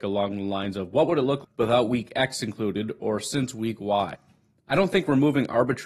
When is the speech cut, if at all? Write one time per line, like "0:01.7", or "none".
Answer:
0:01.4